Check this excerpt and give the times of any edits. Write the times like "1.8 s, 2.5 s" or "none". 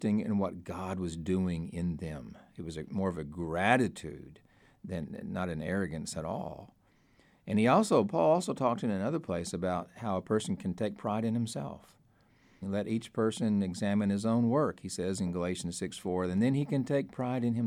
12.6 s